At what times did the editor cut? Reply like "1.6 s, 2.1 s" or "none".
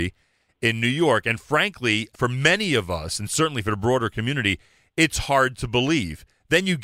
2.1 s